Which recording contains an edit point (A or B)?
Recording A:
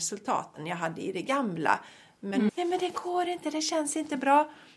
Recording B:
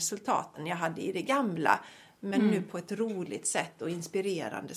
A